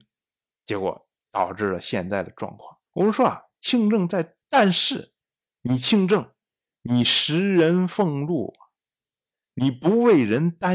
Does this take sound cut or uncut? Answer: cut